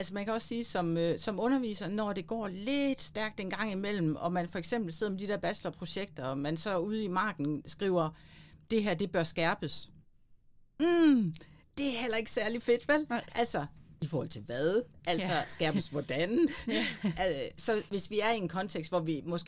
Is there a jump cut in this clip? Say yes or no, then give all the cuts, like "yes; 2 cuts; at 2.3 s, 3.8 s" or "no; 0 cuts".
no; 0 cuts